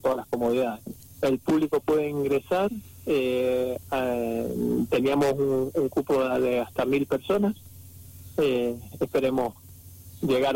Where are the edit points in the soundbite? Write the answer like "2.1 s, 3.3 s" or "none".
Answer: 1.2 s

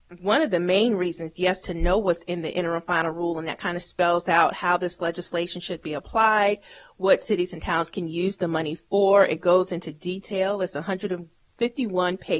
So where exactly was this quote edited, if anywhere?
none

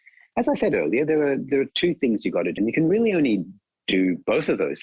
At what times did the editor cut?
2.6 s

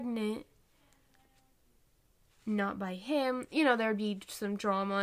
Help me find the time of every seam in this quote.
none

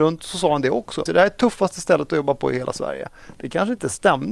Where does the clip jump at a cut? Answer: 1.1 s

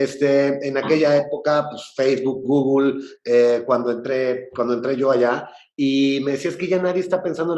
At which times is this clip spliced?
none

